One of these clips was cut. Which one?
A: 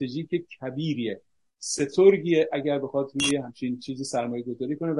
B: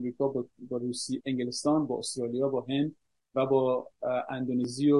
B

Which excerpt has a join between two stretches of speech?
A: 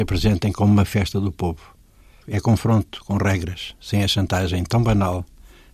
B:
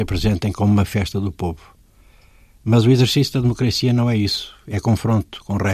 A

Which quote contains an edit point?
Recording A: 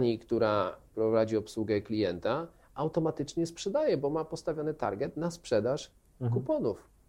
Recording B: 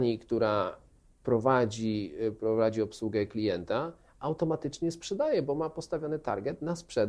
A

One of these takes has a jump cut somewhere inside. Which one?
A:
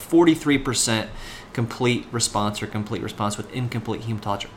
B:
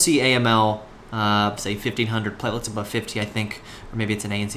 B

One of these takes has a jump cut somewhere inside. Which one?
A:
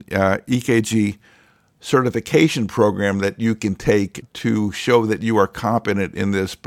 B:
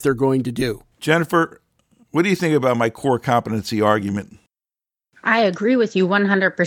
B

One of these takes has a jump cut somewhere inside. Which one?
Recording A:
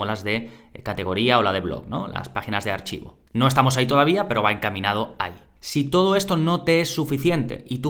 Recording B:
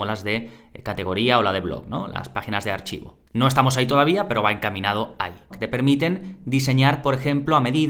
B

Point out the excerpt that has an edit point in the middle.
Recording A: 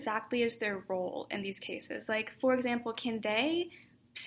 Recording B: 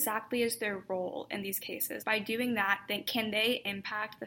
B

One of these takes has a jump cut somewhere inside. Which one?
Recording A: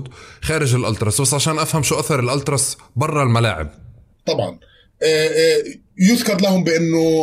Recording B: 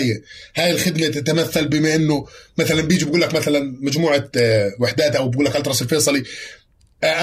A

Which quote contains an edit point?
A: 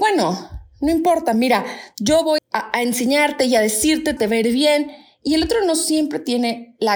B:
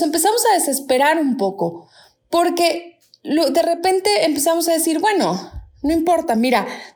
A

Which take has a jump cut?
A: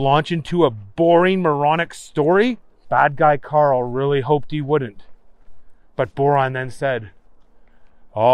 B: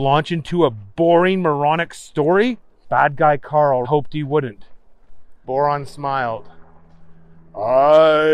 B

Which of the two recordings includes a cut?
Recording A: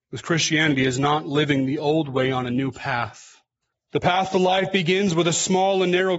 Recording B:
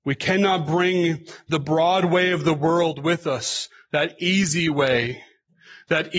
A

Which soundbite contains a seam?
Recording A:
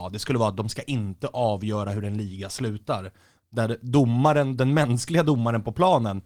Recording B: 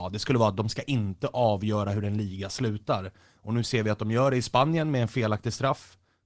A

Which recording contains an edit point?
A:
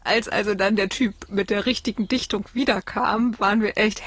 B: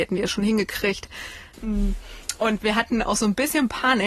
B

